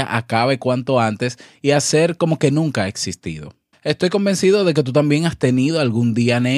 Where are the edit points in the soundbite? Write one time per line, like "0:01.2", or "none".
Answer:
0:03.7